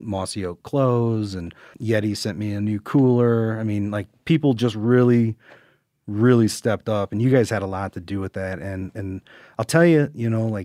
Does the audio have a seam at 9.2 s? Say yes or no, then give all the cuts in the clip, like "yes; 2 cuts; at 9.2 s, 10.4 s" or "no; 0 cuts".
no; 1 cut; at 1.7 s